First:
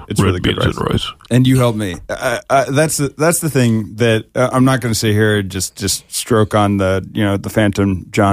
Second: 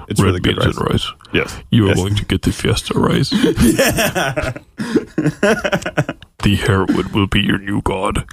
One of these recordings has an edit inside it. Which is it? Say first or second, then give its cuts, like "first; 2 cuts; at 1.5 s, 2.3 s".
first; 1 cut; at 1.3 s